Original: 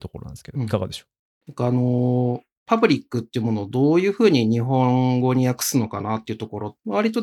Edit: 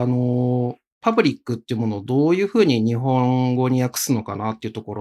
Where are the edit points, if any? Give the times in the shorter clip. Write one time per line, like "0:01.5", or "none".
none

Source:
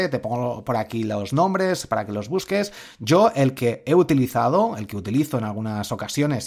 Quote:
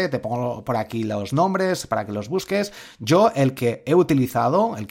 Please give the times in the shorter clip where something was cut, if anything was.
none

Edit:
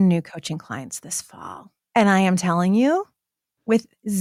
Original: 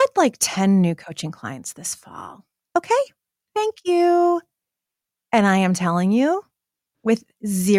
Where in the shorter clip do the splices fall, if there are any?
0:01.8

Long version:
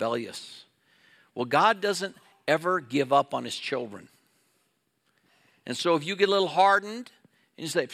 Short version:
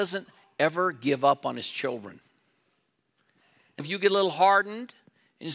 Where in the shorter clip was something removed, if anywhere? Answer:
0:03.8

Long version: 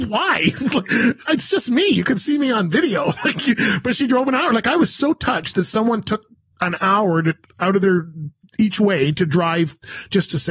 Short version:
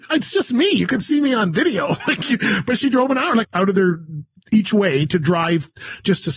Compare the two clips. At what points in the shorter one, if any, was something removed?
0:03.4

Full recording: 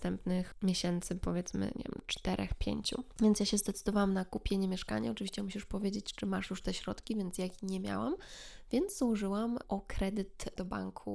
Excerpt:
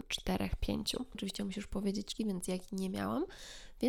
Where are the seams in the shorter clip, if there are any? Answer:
0:01.1
0:02.2

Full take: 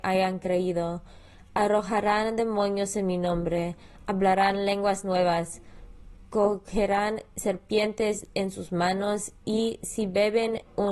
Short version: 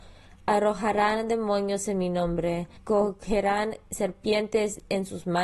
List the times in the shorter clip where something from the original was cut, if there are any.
0:02.8

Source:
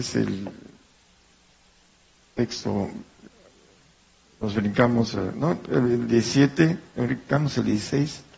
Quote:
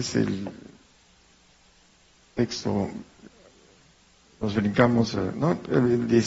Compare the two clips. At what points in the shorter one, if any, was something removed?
none

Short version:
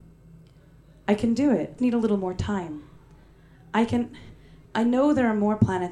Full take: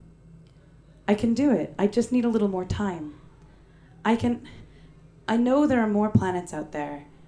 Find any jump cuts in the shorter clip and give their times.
0:01.8
0:04.6

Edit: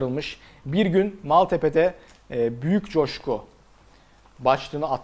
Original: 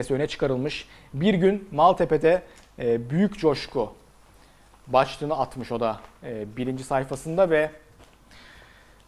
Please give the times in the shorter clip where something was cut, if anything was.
none

